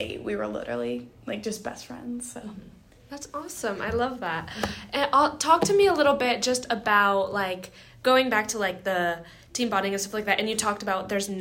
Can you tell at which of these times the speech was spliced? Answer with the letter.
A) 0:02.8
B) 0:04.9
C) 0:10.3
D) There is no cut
D